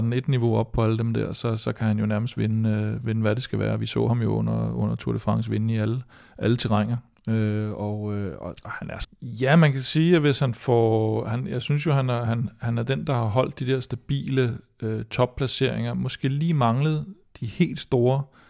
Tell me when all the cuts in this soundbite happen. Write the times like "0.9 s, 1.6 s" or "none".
9.0 s